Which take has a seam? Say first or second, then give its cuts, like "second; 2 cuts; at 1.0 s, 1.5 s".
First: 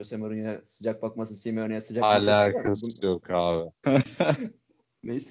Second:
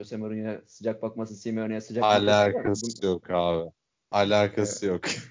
first; 1 cut; at 3.8 s